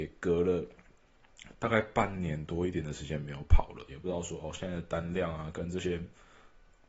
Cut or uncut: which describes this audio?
cut